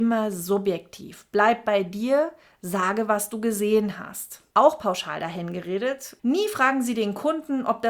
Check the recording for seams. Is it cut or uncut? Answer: cut